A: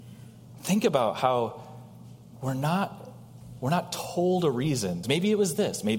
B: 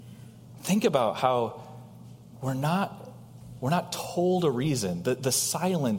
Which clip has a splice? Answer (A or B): A